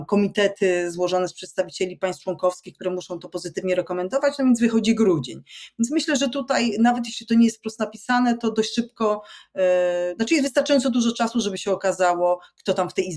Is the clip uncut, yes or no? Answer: yes